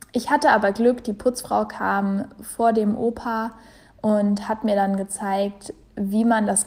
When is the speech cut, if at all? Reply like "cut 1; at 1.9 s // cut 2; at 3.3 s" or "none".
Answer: none